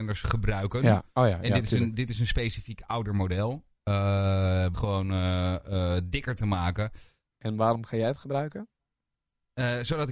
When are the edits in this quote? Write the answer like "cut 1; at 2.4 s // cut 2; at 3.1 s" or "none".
cut 1; at 4.7 s // cut 2; at 7.3 s